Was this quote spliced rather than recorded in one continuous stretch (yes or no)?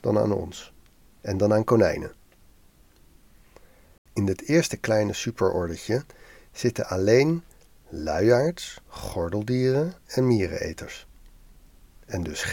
yes